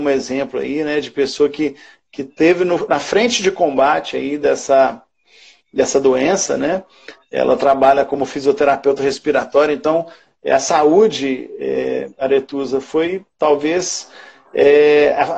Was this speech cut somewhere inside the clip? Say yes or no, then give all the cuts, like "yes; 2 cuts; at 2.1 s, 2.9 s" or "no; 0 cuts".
no; 0 cuts